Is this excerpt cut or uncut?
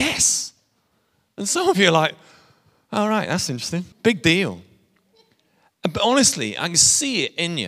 cut